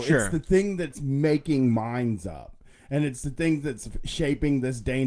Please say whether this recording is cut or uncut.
uncut